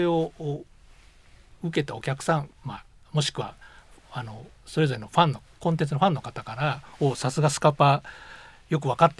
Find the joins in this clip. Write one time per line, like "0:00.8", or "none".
none

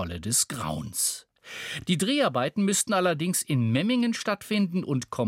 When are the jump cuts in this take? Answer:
none

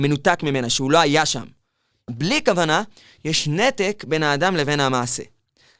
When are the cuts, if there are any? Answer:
0:02.1

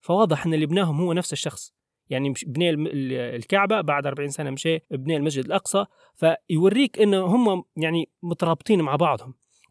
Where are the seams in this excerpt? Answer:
0:04.8

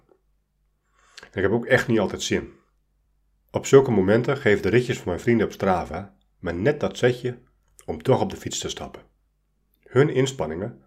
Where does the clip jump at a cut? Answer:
none

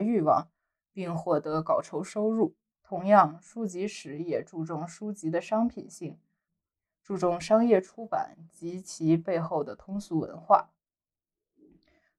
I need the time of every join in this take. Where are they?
0:02.7

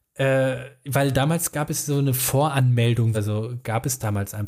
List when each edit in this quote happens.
0:03.1

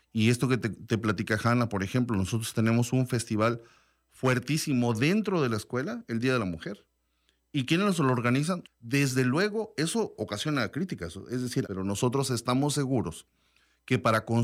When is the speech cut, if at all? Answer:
0:08.6
0:11.6

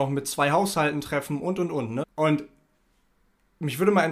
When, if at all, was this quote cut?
0:02.0

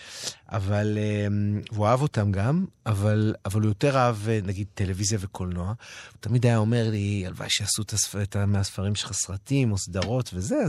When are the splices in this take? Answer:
none

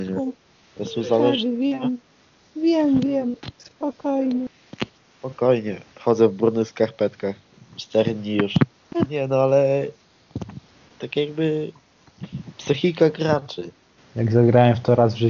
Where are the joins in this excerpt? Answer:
0:09.0
0:14.0

